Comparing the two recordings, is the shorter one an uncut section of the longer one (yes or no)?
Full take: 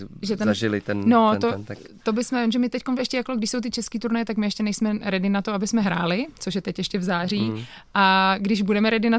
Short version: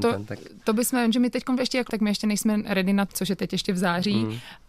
no